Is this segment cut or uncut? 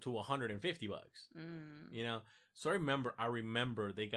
uncut